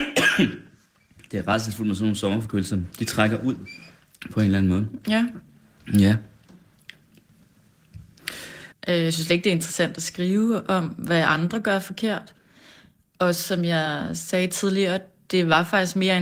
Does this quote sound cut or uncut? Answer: cut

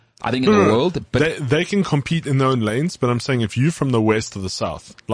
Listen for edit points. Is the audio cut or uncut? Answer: uncut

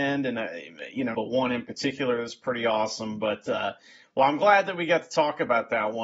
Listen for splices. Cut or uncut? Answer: cut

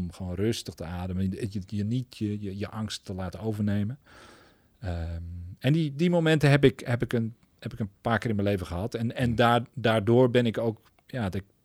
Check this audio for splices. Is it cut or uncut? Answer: uncut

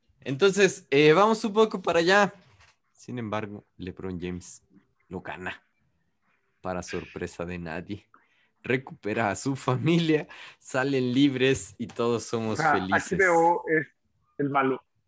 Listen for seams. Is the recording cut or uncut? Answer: cut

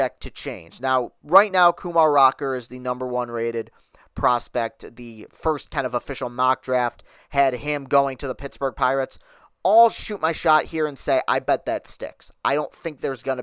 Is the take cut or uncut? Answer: uncut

